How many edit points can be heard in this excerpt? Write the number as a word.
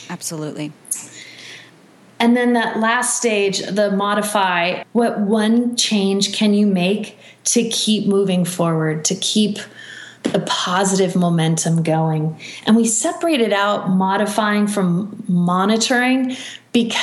one